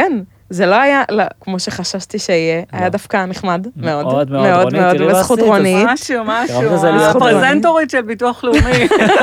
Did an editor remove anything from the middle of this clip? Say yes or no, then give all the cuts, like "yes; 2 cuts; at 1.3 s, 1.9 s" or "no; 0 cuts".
yes; 1 cut; at 1.4 s